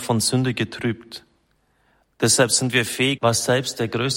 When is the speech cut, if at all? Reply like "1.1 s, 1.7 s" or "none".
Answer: 3.2 s